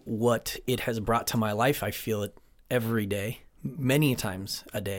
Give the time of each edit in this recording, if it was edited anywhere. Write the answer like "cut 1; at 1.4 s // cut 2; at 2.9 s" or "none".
none